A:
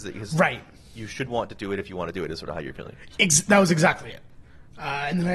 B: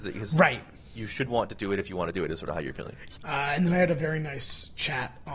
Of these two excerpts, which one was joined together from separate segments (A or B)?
B